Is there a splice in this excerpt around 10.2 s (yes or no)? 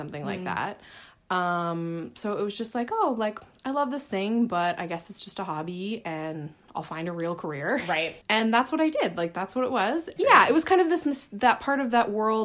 yes